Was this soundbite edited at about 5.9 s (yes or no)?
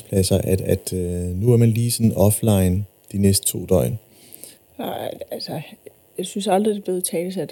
no